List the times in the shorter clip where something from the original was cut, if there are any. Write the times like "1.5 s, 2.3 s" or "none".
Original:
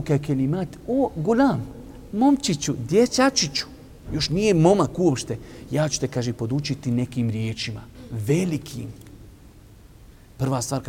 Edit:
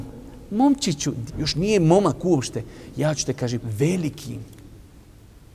1.3 s, 3.6 s